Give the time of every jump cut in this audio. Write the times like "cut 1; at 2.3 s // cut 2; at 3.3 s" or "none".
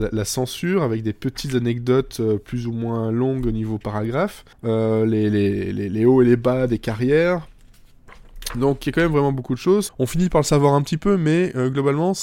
cut 1; at 4.5 s // cut 2; at 9.9 s